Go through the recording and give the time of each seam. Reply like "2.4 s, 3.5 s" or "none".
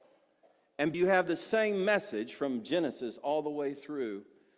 0.9 s